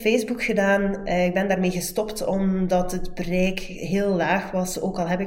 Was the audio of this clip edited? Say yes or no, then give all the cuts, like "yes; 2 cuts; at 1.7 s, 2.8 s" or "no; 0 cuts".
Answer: no; 0 cuts